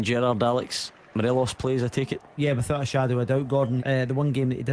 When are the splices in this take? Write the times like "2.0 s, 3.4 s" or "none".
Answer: 3.8 s